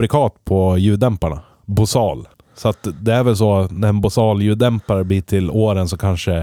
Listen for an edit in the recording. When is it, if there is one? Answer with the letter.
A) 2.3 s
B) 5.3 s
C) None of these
A